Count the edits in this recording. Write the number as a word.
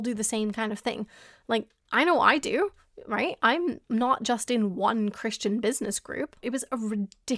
one